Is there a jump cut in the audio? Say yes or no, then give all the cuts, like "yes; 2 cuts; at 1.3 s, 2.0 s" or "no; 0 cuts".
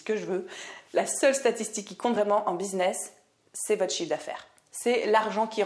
no; 0 cuts